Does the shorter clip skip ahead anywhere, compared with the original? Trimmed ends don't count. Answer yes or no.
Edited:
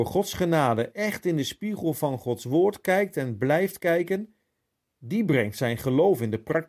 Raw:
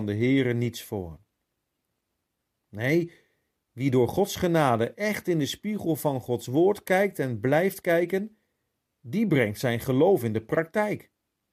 no